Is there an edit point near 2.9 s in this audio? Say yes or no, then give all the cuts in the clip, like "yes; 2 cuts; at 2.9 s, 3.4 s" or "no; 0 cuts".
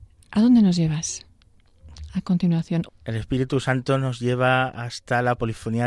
yes; 1 cut; at 2.9 s